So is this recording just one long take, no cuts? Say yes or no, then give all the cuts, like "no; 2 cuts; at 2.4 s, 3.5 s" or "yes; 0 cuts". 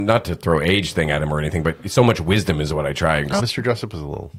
no; 1 cut; at 3.4 s